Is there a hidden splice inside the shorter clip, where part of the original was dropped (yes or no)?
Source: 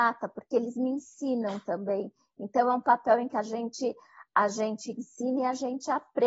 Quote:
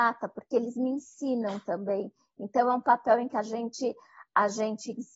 no